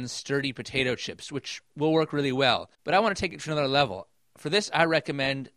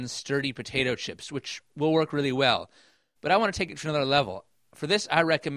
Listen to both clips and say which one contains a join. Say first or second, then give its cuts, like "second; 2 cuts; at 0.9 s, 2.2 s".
first; 1 cut; at 2.7 s